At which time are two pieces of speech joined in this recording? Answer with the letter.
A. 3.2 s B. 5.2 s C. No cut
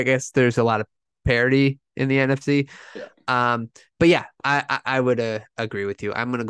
C